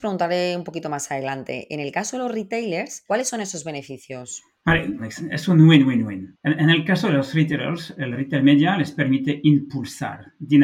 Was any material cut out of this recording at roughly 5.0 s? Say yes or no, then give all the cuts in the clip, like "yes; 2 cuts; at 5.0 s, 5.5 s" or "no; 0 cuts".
yes; 1 cut; at 5.0 s